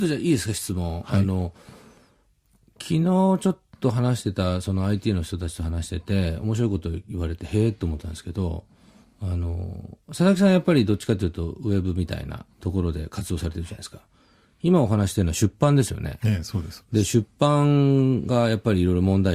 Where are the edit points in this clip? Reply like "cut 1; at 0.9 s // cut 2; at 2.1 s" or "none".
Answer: cut 1; at 12.5 s